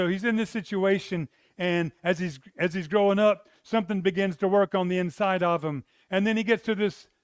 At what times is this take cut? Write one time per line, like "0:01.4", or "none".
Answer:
none